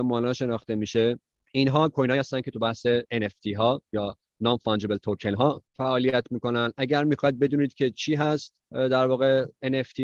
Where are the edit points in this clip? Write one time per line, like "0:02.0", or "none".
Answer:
0:05.7
0:08.6